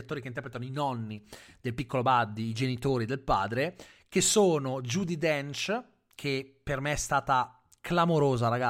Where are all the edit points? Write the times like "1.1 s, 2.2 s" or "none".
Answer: none